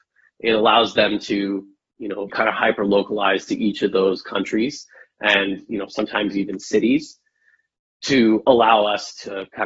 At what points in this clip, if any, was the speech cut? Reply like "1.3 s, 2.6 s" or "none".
2.3 s